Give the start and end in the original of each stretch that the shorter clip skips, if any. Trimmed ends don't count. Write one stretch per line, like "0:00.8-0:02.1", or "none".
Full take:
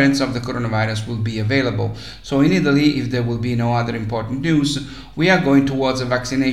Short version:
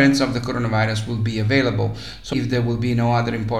0:02.3-0:02.9